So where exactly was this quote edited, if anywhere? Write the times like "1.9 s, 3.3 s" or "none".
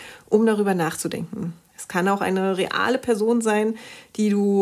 1.7 s